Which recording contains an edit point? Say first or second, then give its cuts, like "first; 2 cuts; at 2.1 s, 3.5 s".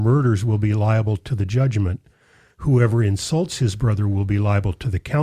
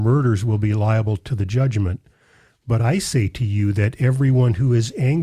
first; 1 cut; at 2.5 s